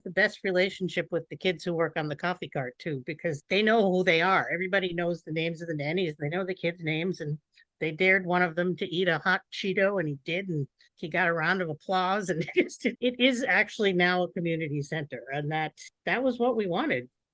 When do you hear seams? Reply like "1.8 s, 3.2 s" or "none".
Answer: none